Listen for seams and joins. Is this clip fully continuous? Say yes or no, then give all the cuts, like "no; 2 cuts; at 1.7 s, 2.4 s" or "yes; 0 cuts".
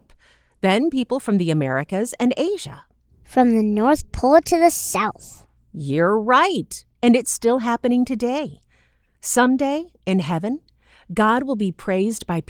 yes; 0 cuts